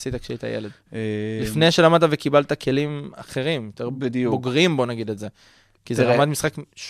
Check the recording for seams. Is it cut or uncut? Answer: uncut